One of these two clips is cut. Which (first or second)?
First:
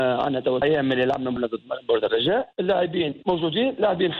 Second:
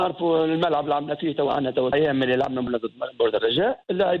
second